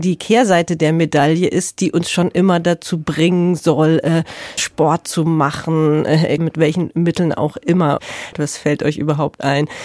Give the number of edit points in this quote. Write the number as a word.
three